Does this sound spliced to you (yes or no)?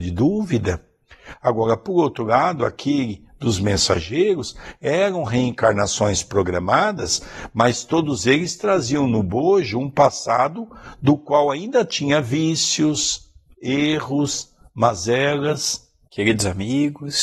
yes